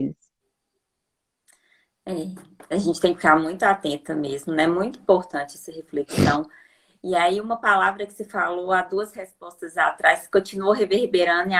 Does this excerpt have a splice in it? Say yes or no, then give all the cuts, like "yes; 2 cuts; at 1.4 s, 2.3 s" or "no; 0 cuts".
no; 0 cuts